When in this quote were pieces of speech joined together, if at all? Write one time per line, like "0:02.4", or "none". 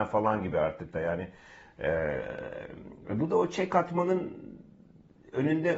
none